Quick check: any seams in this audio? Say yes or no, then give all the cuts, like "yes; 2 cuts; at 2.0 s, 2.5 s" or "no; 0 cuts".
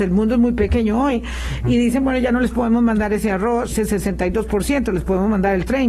yes; 1 cut; at 3.7 s